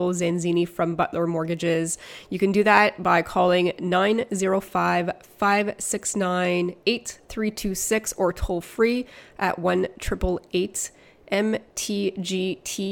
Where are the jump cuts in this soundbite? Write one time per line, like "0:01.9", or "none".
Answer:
none